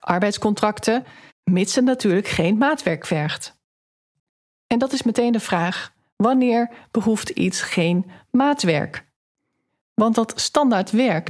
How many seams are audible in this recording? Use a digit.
1